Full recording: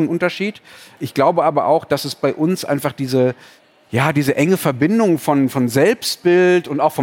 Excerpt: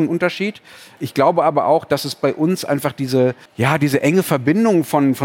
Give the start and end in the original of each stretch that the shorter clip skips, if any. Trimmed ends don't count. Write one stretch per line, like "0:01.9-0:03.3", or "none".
0:03.5-0:03.8